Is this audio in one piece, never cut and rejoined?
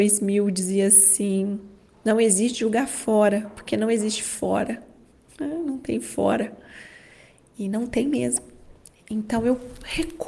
yes; 0 cuts

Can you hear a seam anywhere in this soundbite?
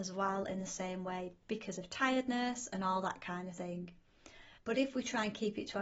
yes; 1 cut; at 4.6 s

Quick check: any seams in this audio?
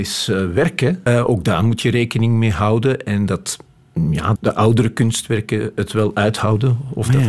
yes; 2 cuts; at 1.1 s, 4.4 s

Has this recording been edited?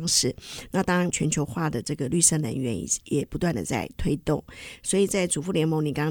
yes; 1 cut; at 1.1 s

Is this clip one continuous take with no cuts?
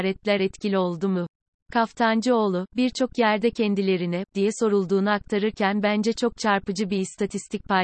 no; 2 cuts; at 1.6 s, 4.3 s

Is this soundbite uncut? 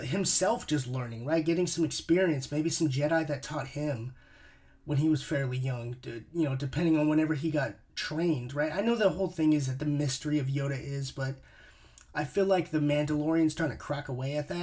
yes; 0 cuts

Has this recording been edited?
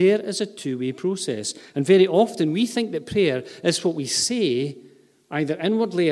no; 0 cuts

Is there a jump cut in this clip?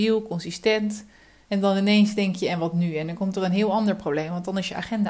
yes; 1 cut; at 1.5 s

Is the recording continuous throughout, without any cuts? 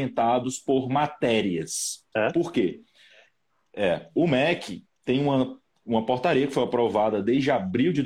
no; 2 cuts; at 2.1 s, 4.2 s

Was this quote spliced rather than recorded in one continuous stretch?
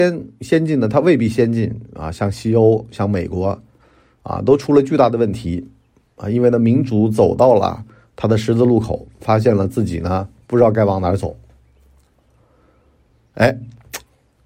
no; 0 cuts

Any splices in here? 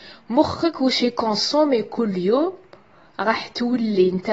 no; 0 cuts

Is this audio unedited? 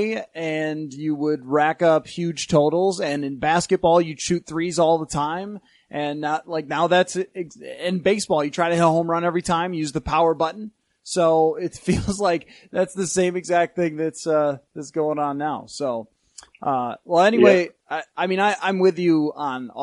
yes; 0 cuts

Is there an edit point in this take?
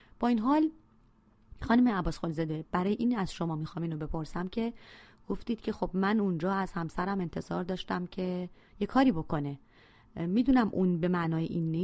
no; 0 cuts

